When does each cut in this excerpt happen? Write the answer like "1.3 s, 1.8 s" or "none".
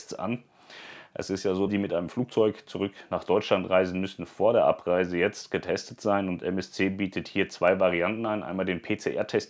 1.7 s